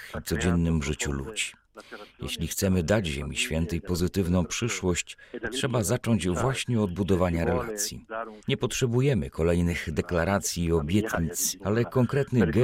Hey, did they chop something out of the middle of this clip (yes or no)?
yes